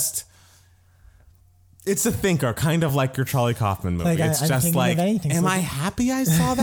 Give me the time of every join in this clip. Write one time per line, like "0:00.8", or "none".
none